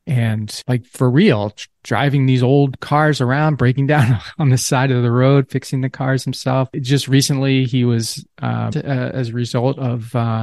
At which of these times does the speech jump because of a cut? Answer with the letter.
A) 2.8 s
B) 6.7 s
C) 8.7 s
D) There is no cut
C